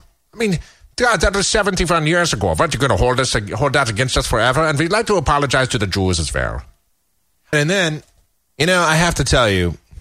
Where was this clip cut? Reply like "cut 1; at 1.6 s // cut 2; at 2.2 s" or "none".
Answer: cut 1; at 7.5 s